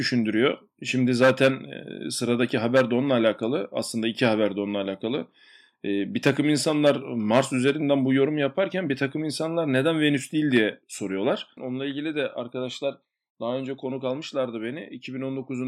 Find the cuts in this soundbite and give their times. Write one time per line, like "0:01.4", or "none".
0:11.6